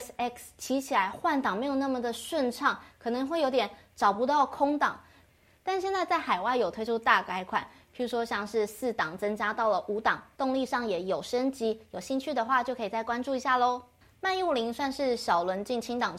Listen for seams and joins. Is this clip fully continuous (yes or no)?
yes